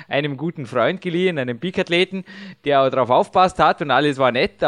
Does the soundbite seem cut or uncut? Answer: uncut